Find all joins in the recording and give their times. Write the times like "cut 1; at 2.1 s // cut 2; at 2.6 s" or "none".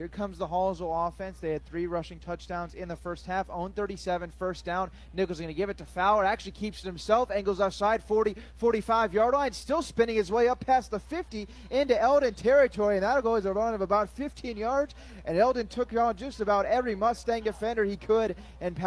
none